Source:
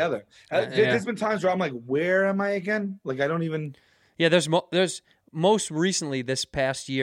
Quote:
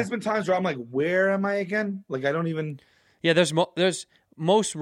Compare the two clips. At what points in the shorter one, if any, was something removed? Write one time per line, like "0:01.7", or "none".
none